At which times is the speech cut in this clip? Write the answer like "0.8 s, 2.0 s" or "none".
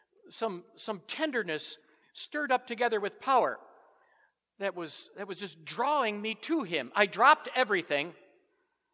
none